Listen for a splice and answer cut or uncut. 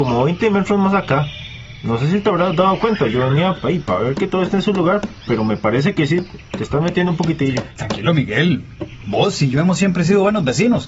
uncut